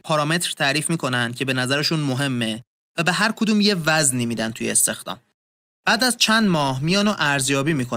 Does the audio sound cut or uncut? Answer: cut